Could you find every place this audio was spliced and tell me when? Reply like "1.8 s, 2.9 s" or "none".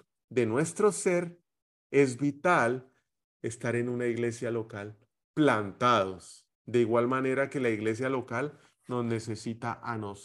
6.5 s

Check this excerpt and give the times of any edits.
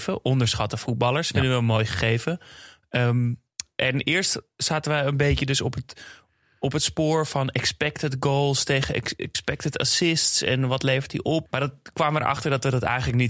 11.5 s

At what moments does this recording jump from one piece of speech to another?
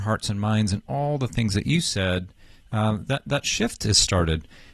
none

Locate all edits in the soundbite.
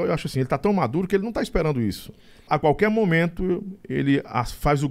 2.5 s

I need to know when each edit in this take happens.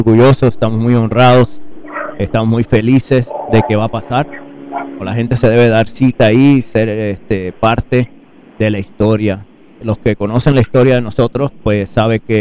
5.0 s

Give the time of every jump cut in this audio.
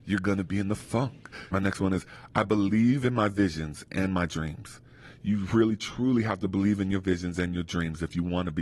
1.5 s

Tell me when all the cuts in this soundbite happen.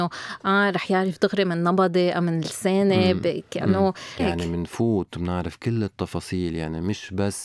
4.2 s

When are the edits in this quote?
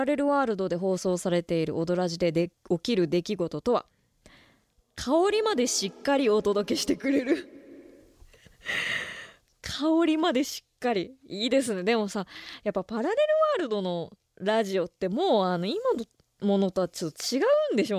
none

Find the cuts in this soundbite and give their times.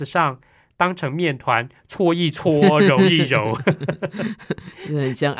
none

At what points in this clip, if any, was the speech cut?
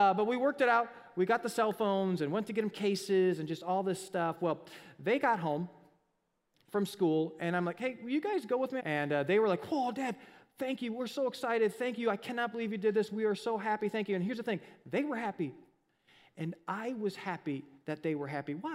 8.8 s

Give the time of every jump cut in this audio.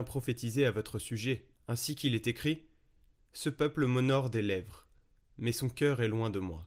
1.5 s

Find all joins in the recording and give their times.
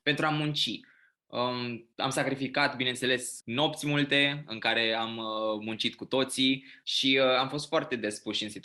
3.4 s, 6.8 s

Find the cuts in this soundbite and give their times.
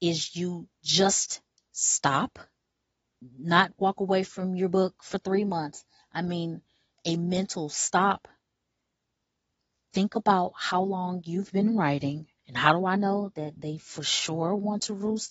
12.4 s

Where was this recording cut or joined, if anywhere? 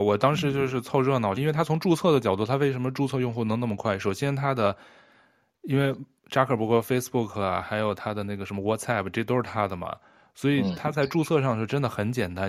1.4 s, 7.6 s

